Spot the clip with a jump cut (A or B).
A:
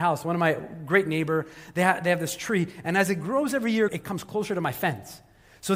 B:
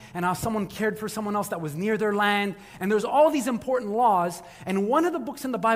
A